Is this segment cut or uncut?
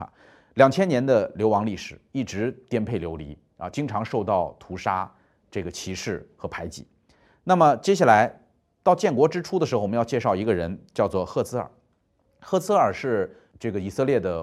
uncut